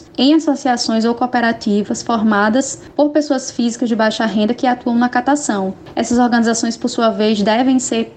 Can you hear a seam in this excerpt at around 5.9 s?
no; 0 cuts

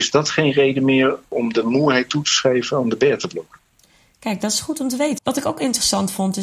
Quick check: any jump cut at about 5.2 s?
yes; 1 cut; at 5.2 s

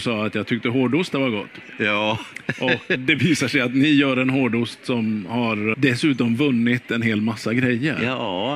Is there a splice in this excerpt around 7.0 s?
no; 2 cuts; at 3.0 s, 5.7 s

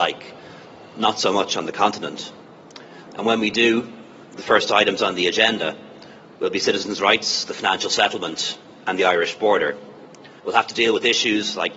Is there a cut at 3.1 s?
yes; 2 cuts; at 3.1 s, 10.4 s

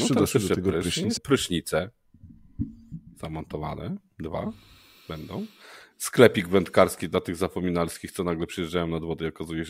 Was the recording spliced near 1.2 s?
yes; 1 cut; at 1.2 s

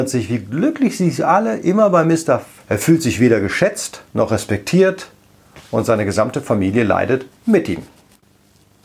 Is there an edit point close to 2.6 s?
yes; 2 cuts; at 2.6 s, 4.1 s

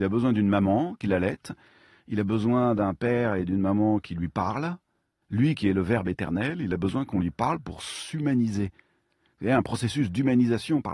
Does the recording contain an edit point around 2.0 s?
no; 0 cuts

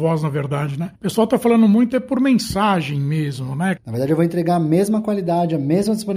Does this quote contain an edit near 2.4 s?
no; 2 cuts; at 1.0 s, 3.8 s

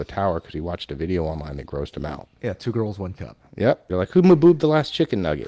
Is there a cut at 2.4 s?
no; 1 cut; at 3.9 s

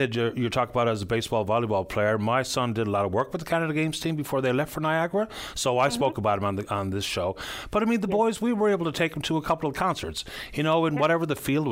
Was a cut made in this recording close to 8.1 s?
no; 0 cuts

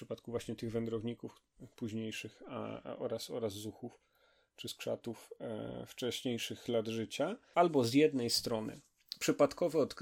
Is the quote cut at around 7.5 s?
yes; 1 cut; at 7.5 s

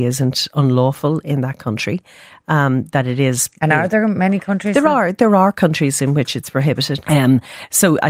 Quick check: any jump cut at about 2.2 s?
no; 1 cut; at 7.0 s

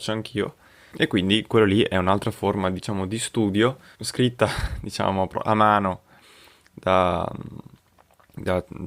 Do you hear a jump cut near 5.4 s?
no; 2 cuts; at 0.9 s, 3.9 s

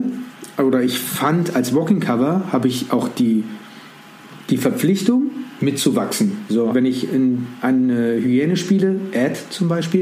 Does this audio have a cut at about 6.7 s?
yes; 1 cut; at 6.7 s

